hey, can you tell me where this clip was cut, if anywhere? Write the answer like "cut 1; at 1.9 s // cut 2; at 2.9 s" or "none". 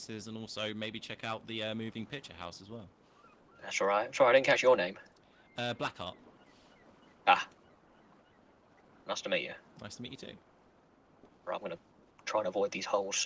none